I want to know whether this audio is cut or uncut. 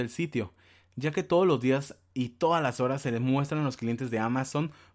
uncut